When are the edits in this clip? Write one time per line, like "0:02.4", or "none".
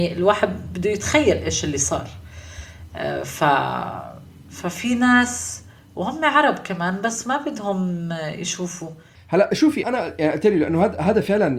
0:09.8